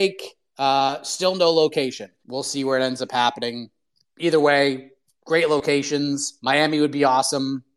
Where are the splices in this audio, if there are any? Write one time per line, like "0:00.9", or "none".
0:02.2